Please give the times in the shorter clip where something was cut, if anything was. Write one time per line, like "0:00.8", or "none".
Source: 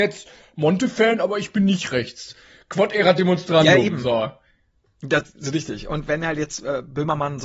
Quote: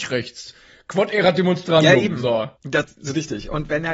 0:02.5